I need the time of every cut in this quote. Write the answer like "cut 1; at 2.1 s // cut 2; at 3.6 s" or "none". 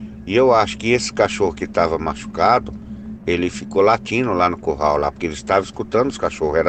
none